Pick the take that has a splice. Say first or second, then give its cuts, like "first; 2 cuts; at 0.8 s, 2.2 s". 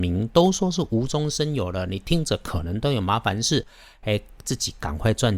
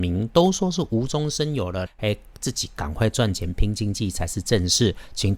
second; 1 cut; at 1.9 s